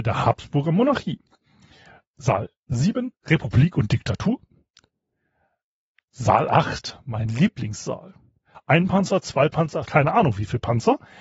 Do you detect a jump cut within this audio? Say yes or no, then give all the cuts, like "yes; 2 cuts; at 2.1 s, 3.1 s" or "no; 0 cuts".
yes; 2 cuts; at 8.5 s, 9.8 s